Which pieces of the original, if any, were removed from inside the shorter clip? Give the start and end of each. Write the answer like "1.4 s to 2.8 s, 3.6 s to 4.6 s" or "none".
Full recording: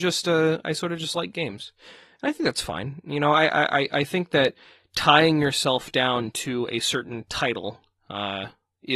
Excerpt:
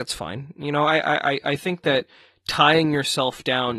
none

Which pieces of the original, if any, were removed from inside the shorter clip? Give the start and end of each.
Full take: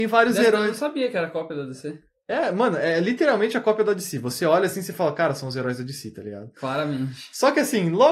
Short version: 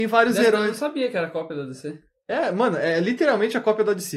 none

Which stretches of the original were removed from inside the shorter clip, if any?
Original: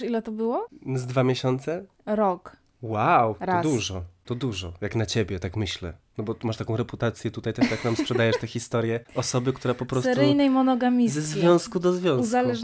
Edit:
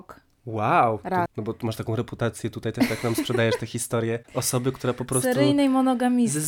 3.6 s to 6.1 s

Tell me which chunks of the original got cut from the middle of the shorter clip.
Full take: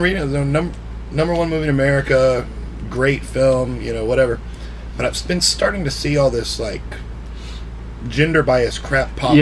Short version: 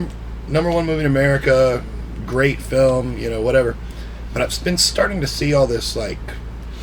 none

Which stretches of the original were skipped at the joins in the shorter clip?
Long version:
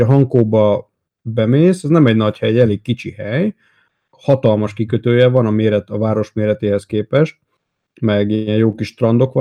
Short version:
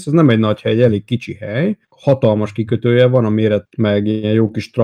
3.6 s to 4.1 s, 5.9 s to 7.9 s

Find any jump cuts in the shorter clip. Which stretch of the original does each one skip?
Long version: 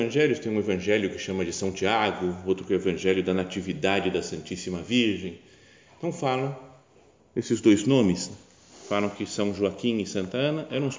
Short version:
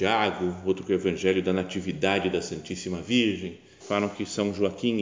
5.6 s to 8.8 s

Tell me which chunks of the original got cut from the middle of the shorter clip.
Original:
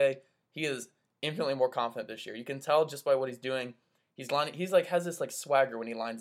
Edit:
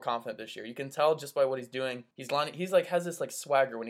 3.8 s to 4.1 s

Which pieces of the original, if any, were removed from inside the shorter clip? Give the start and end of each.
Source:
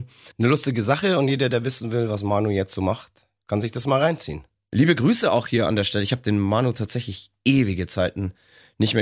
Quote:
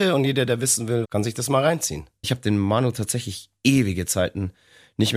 2.1 s to 3.4 s, 4.6 s to 6.0 s

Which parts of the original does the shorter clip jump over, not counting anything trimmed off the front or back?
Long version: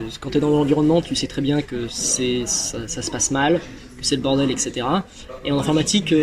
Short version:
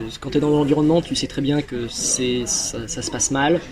none

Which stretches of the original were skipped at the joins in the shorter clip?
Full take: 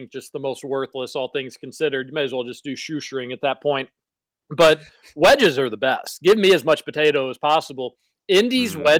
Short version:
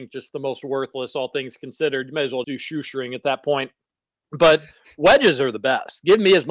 2.4 s to 2.6 s

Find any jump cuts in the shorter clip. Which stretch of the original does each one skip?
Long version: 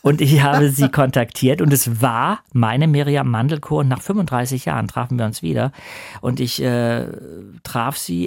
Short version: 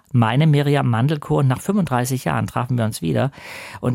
none

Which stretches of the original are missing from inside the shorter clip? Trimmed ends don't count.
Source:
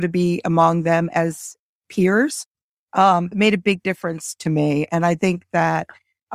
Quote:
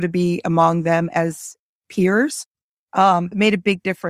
none

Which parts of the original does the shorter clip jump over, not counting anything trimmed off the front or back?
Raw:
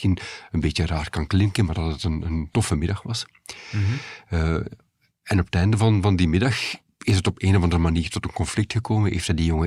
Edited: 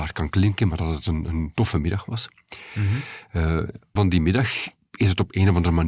4.9 s to 6.0 s

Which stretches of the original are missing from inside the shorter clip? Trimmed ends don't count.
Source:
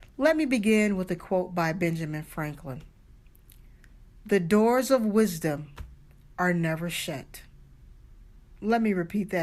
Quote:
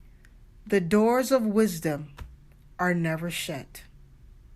none

